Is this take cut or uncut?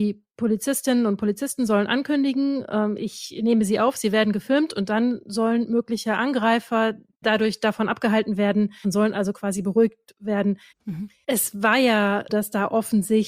cut